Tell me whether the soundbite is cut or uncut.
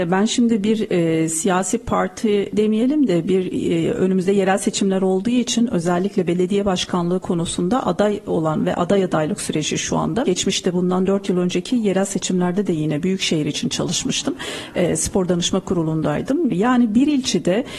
cut